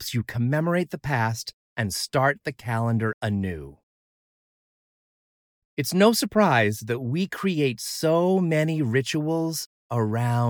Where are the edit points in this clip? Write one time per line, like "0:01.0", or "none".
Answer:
0:05.6